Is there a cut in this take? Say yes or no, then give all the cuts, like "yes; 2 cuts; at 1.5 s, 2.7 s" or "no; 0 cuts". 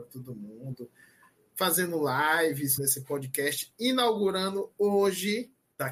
yes; 1 cut; at 2.8 s